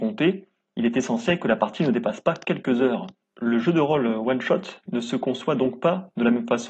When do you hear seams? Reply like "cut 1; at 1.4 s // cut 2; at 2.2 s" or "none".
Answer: cut 1; at 3.2 s